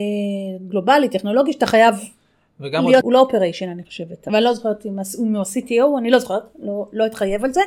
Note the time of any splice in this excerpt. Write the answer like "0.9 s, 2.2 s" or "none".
3.0 s